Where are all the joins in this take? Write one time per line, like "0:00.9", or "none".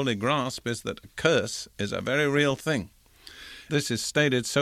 0:03.7